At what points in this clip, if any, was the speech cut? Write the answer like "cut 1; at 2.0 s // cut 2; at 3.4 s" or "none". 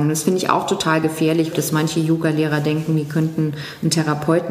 cut 1; at 1.5 s